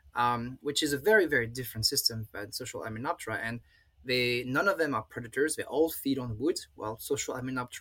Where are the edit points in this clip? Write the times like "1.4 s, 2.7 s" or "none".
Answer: none